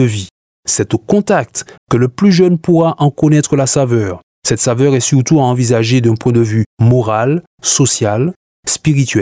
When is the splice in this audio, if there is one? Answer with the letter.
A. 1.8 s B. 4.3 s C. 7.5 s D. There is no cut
A